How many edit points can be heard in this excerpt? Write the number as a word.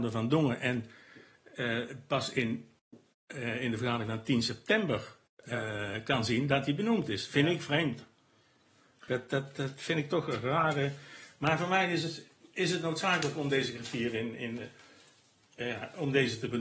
zero